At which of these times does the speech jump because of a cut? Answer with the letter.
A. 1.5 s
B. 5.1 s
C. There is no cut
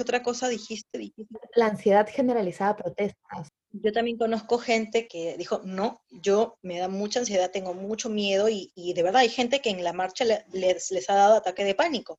B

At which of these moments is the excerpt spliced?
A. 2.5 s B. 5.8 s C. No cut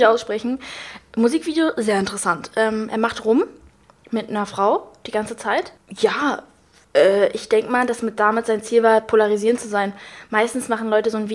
C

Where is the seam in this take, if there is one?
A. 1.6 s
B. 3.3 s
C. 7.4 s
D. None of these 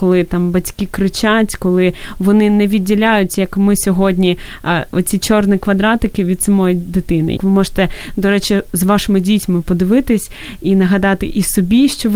C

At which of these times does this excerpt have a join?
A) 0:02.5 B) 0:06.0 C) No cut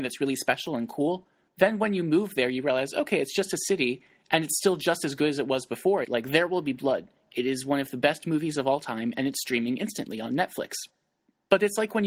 B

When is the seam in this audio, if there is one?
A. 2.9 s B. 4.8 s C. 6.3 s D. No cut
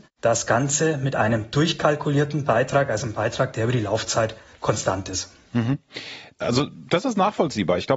D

